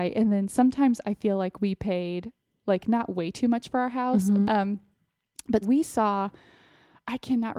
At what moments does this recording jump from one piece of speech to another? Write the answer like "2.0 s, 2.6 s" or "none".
4.4 s, 5.6 s